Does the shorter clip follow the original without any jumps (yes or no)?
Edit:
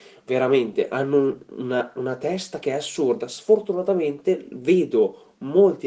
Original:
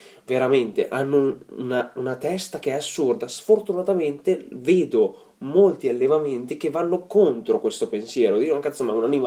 yes